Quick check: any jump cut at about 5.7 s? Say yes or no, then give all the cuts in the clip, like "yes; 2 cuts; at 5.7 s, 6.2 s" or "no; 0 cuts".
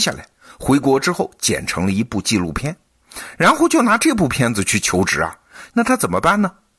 yes; 1 cut; at 5.7 s